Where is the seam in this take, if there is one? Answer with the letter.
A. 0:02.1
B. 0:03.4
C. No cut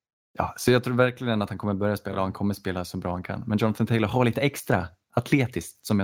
C